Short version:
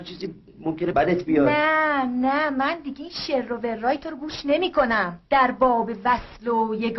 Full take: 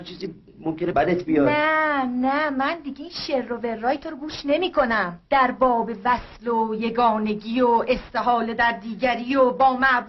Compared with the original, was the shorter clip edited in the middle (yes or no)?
no